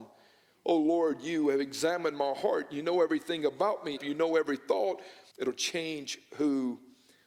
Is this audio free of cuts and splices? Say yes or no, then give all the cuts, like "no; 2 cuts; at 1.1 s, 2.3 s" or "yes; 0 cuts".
no; 2 cuts; at 4.0 s, 5.3 s